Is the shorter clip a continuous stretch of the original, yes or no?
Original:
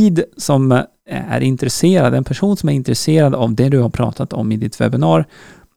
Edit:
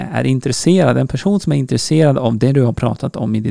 yes